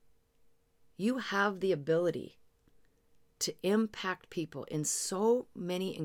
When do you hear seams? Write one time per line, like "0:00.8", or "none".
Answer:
none

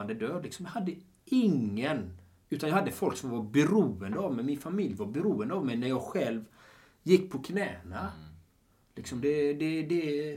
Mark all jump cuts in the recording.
none

